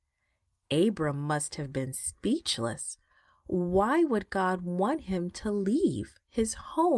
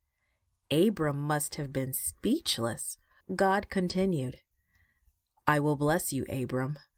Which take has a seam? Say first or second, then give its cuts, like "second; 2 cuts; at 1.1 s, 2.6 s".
second; 1 cut; at 3.2 s